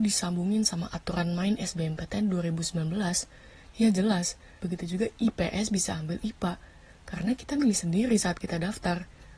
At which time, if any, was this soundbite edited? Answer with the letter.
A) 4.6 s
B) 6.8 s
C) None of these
A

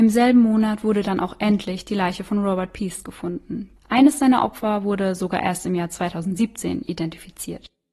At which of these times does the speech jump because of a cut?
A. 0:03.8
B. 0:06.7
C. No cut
A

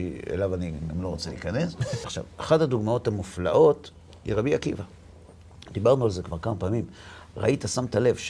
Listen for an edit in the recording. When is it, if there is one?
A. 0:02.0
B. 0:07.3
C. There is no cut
A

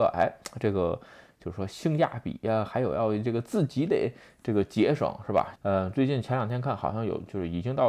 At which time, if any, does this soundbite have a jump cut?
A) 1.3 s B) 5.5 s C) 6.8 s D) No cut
B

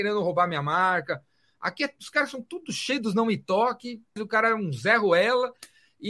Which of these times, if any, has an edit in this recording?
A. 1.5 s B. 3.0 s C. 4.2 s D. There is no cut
C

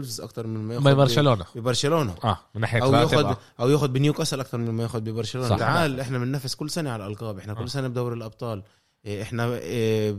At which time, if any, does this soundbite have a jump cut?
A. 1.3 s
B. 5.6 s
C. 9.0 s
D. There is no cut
B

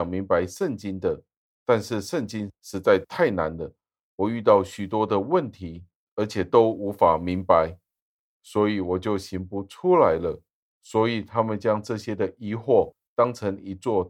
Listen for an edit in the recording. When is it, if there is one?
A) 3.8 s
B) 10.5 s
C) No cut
C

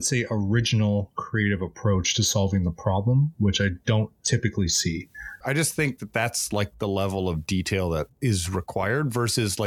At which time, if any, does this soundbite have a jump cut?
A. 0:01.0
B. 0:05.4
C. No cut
B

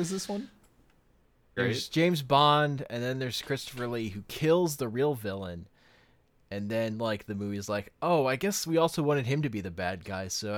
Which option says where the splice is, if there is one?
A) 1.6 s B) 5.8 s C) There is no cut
A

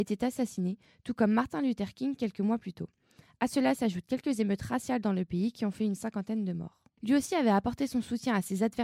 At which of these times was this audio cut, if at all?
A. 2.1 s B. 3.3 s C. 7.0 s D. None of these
C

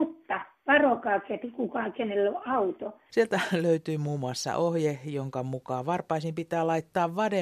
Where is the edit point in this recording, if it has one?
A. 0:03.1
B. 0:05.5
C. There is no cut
A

